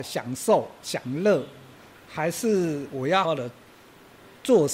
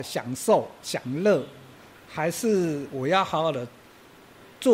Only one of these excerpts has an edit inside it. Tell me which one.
first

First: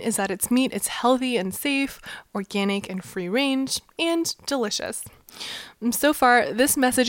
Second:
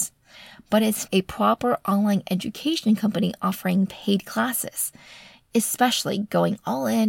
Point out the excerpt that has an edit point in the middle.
second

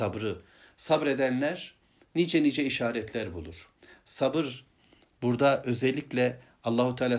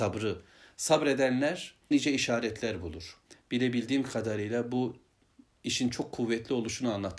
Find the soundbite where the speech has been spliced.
second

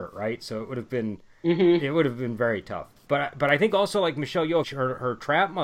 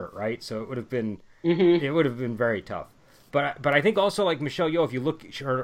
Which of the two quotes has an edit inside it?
first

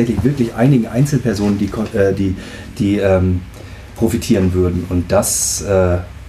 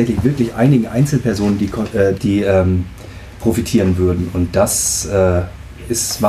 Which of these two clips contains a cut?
second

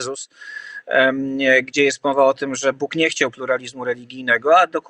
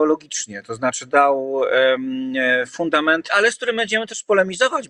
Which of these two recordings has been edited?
second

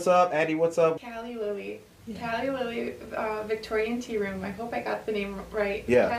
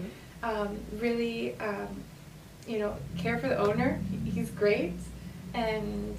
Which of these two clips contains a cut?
first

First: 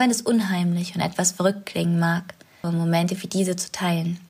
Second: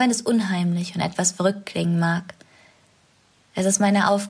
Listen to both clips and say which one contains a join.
first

